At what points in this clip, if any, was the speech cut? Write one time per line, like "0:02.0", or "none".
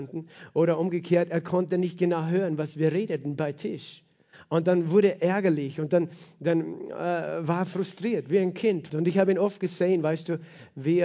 0:08.9